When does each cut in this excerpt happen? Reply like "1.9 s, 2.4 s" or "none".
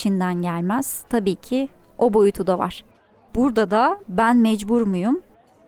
4.0 s